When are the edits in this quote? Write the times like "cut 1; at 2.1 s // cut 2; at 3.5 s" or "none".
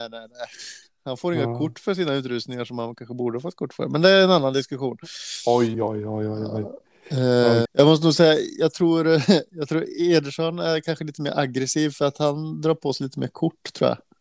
cut 1; at 5.7 s // cut 2; at 7.7 s